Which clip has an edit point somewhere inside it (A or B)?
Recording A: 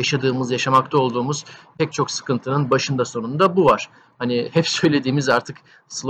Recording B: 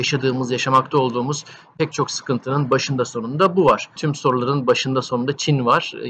B